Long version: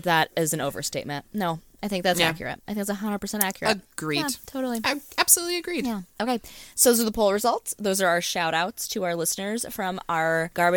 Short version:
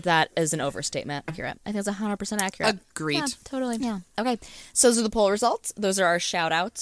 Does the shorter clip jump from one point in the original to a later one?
yes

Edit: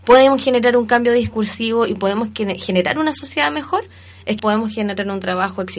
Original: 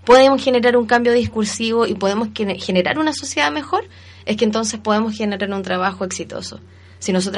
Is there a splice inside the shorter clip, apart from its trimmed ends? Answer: yes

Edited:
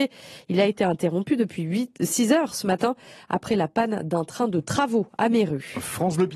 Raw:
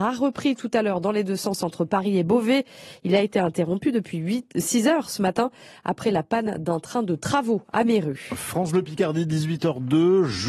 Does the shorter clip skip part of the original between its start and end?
no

